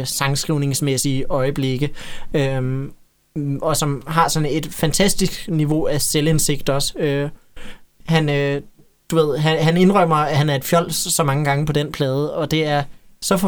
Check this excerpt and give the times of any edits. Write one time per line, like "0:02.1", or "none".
none